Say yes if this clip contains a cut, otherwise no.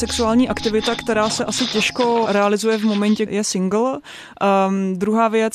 yes